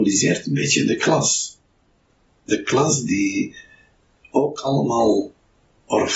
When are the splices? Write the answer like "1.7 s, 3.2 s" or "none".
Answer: none